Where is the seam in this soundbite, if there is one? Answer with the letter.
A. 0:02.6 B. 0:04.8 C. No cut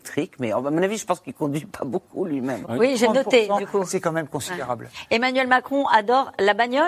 A